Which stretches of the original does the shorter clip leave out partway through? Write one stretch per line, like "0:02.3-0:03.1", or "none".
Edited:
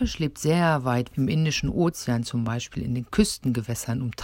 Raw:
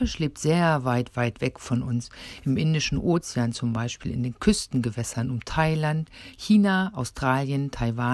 0:01.1-0:02.4